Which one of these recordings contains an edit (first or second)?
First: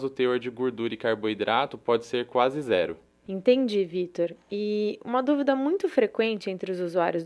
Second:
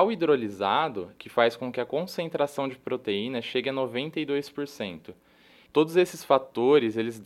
second